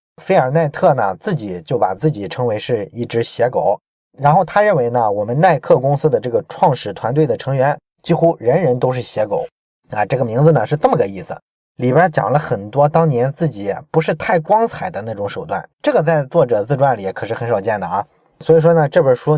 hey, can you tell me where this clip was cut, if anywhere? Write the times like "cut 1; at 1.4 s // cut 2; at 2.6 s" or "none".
cut 1; at 11.7 s // cut 2; at 15.7 s